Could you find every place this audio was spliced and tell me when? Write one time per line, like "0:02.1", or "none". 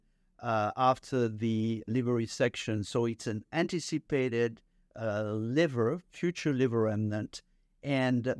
none